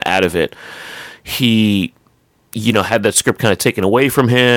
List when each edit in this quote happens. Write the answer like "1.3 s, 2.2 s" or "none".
none